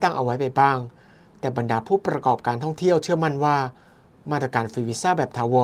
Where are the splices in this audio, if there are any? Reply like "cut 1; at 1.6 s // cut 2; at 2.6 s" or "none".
none